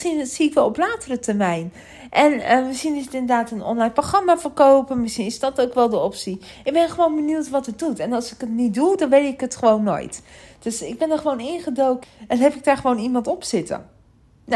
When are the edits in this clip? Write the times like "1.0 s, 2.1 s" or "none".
12.0 s